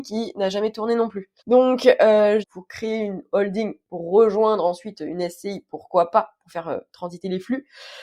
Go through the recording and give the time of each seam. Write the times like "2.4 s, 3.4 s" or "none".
1.4 s, 2.4 s